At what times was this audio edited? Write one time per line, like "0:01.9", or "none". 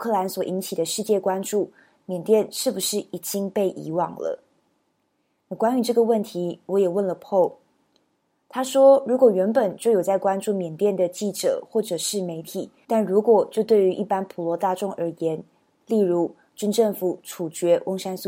0:12.8
0:15.8